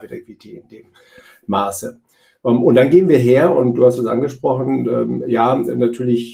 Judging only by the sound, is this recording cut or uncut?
uncut